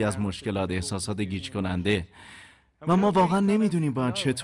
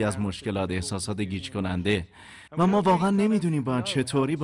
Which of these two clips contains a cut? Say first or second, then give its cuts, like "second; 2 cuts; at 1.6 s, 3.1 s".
second; 1 cut; at 2.5 s